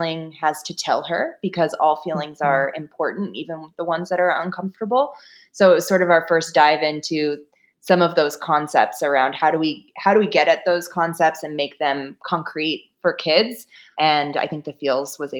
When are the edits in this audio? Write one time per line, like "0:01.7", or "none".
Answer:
none